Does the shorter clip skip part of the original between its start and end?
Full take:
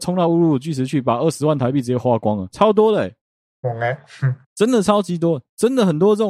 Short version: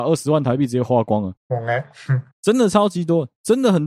yes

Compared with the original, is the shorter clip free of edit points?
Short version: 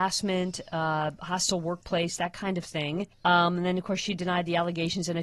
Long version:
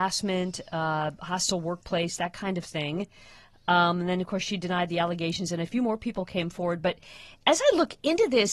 no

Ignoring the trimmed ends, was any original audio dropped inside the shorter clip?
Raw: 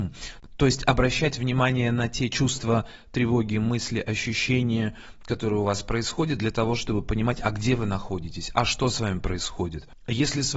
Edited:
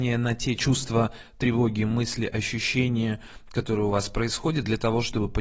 no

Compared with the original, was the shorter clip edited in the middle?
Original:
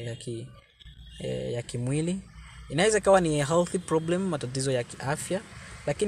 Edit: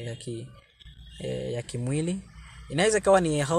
no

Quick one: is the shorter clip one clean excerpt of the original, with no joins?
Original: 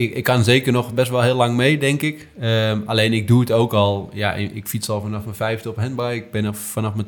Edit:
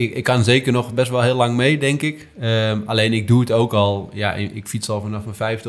yes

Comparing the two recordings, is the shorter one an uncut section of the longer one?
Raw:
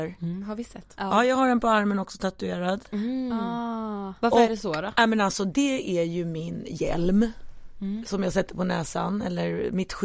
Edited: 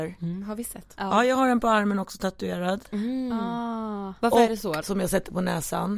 no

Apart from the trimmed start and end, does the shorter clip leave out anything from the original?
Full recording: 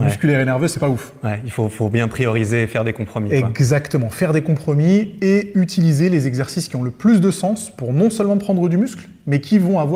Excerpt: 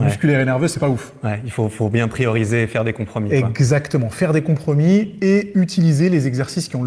no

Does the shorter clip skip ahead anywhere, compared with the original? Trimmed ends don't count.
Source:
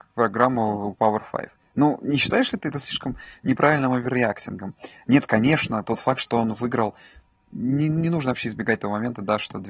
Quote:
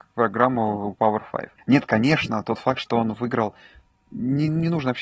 yes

